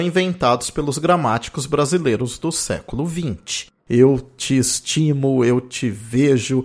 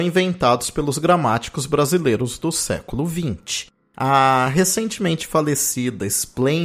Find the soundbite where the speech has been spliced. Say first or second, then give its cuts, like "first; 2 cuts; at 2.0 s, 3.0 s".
first; 1 cut; at 3.8 s